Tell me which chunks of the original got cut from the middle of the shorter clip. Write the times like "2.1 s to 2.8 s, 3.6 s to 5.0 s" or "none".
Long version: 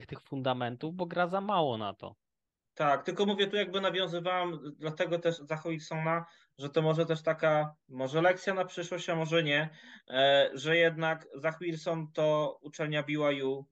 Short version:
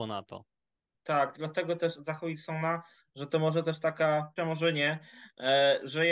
3.0 s to 4.8 s, 7.8 s to 9.1 s

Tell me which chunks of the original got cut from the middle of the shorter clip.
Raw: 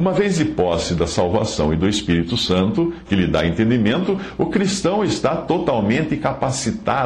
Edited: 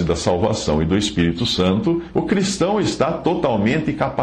3.0 s to 4.4 s

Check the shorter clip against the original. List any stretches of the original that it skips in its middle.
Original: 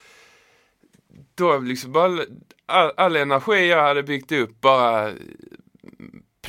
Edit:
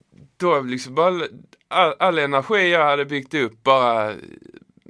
none

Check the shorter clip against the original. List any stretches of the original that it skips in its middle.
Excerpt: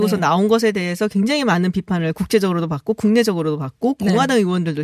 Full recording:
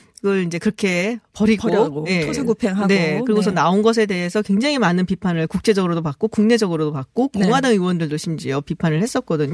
none

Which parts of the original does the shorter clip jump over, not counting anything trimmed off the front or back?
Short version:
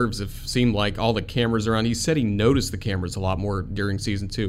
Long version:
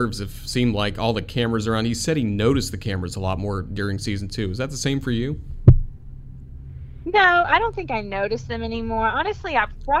none

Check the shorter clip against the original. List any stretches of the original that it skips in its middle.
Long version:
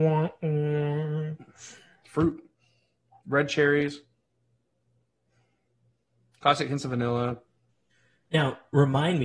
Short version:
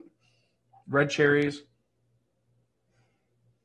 none

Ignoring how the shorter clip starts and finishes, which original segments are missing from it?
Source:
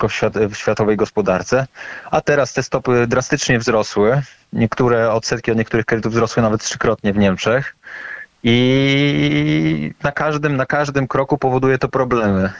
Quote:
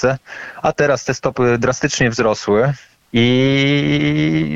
4.5 s to 8.3 s

